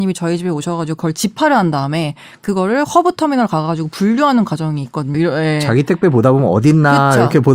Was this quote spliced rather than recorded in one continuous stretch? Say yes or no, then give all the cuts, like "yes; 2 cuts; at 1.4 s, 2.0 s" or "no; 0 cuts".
yes; 1 cut; at 5.1 s